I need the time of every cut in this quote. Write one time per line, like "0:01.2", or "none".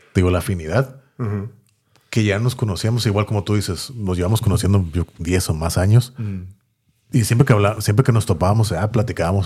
none